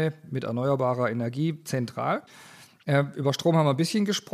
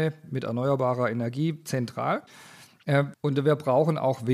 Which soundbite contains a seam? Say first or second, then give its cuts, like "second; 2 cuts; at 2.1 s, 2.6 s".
second; 1 cut; at 3.1 s